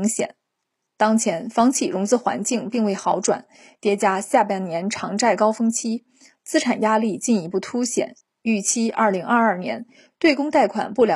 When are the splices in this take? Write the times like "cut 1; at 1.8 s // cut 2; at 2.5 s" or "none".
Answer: none